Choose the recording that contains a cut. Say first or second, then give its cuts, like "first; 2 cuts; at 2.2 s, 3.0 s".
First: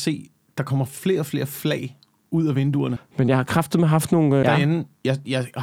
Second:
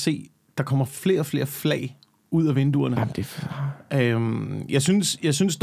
first; 2 cuts; at 3.0 s, 4.4 s